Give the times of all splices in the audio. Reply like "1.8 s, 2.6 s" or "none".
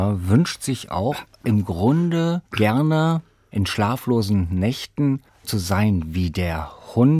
2.4 s, 5.4 s